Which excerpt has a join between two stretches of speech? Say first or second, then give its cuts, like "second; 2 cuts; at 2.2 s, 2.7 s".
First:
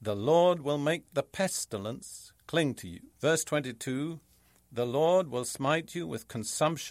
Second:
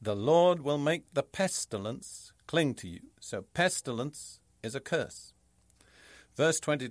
first; 1 cut; at 3.1 s